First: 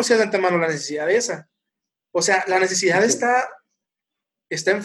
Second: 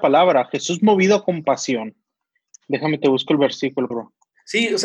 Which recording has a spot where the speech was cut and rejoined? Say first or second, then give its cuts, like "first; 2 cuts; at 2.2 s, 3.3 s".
second; 2 cuts; at 2.5 s, 3.9 s